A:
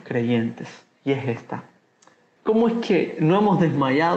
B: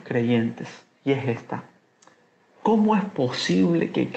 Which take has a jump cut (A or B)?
A